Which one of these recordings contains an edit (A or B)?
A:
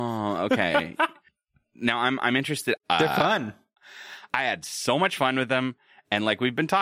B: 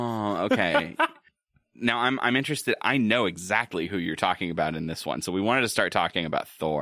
A